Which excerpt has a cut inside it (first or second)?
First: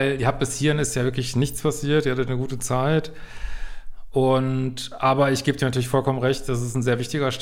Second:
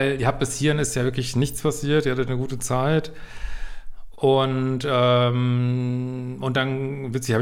second